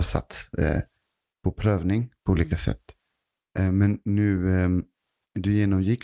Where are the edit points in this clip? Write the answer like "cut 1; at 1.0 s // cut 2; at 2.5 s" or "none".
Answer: none